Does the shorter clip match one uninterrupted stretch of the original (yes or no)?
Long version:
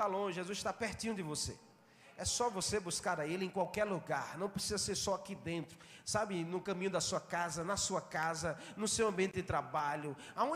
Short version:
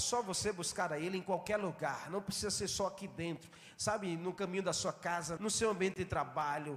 no